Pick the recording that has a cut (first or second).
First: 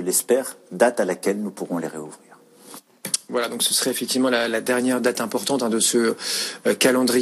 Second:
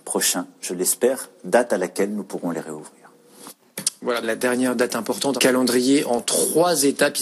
second